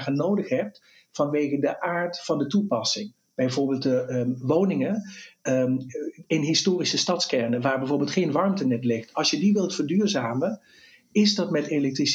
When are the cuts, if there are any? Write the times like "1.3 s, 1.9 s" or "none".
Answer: none